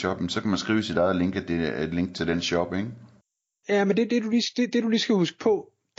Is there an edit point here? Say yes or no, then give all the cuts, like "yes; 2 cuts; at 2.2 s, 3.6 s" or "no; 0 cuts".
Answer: no; 0 cuts